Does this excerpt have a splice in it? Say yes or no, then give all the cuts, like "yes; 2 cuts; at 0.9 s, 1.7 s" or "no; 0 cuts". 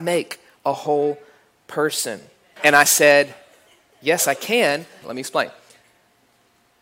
yes; 2 cuts; at 2.6 s, 5.0 s